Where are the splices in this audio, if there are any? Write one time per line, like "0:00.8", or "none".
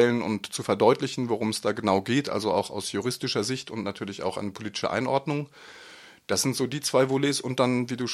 none